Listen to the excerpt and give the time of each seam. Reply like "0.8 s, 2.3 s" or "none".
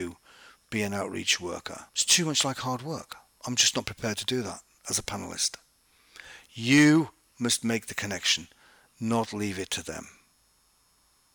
1.9 s